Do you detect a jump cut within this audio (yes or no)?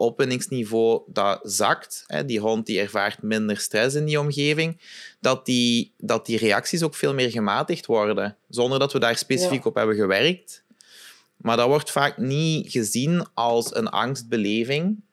no